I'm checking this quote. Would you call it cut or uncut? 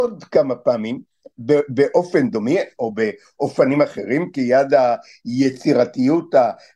uncut